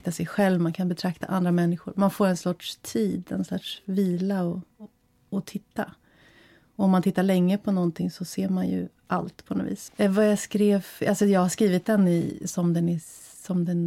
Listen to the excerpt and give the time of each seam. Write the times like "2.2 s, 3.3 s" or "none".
9.9 s

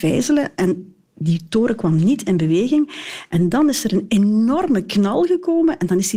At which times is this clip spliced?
none

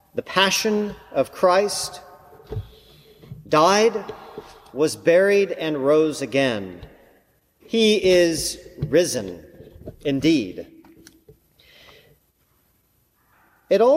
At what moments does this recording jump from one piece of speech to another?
7.6 s

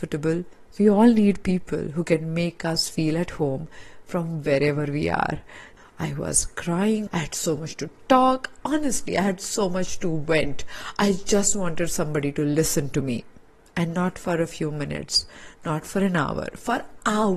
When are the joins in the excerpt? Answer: 5.8 s, 7.1 s

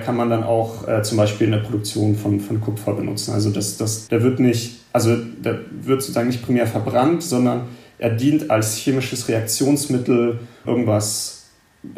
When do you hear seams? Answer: 4.1 s, 10.6 s

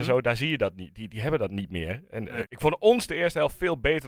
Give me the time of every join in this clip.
2.5 s

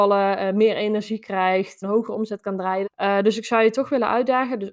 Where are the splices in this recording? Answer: 1.8 s, 2.8 s

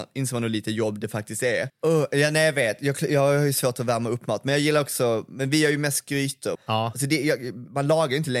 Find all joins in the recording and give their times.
1.7 s, 6.6 s

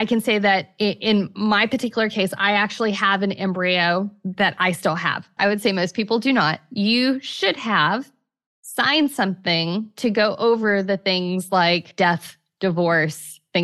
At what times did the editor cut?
5.4 s

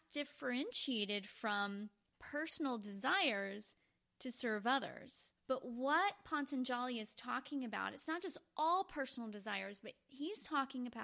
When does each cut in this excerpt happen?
5.4 s

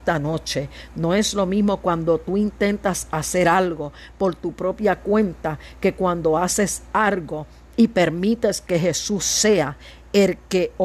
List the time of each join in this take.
none

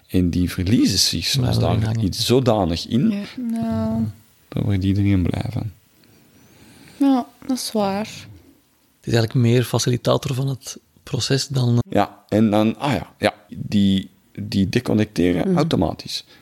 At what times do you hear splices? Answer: 3.4 s, 11.8 s, 13.5 s

